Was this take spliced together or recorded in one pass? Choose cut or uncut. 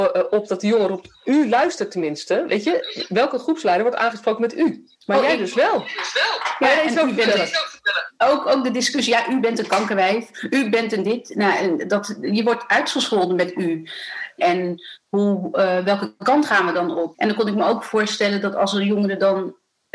cut